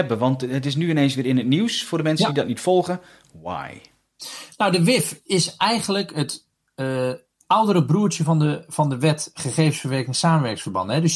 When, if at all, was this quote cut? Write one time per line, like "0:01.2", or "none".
none